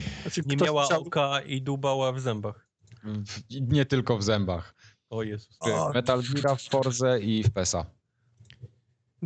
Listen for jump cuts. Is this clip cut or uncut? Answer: cut